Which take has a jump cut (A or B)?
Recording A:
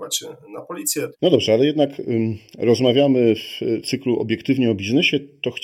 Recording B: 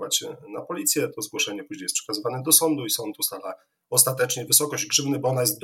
A